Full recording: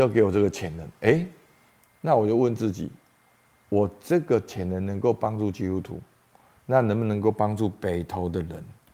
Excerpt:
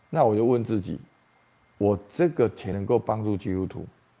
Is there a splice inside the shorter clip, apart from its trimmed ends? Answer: yes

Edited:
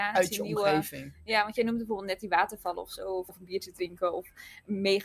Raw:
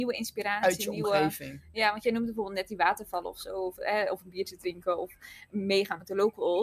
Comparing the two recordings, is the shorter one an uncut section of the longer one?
no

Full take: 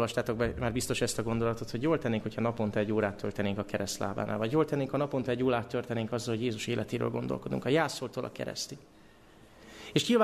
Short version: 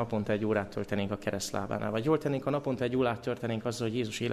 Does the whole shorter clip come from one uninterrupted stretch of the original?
yes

